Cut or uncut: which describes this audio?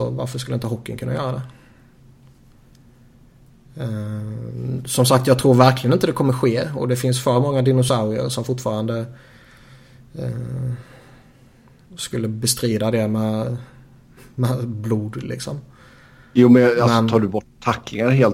uncut